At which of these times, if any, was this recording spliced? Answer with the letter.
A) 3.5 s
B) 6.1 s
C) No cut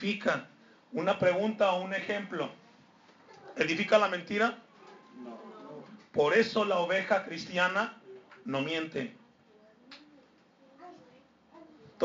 C